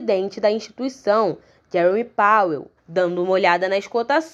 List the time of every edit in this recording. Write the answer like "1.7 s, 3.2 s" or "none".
2.8 s